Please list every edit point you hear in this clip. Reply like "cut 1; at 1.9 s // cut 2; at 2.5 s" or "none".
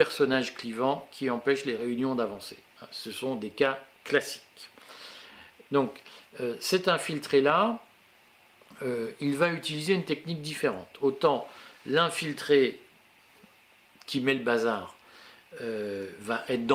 cut 1; at 5.7 s